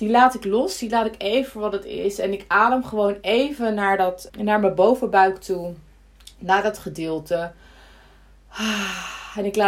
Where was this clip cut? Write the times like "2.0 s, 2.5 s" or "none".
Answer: 4.3 s

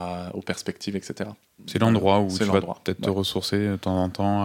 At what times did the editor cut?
1.6 s

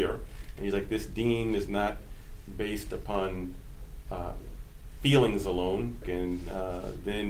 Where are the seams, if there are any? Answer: 6.0 s

